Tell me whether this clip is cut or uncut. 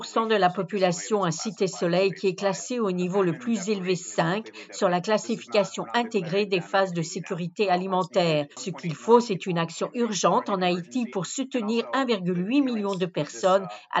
uncut